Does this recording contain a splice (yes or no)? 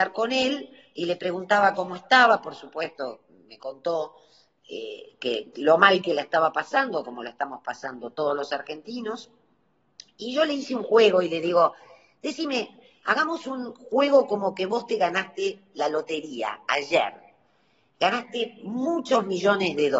no